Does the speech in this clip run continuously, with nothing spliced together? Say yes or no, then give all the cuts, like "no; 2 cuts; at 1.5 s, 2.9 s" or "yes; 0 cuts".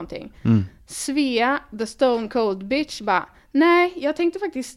yes; 0 cuts